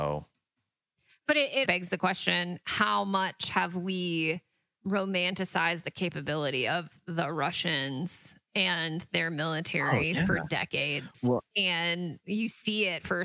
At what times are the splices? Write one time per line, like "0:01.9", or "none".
0:01.6